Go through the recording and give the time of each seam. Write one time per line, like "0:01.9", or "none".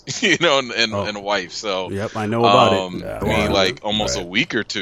0:03.2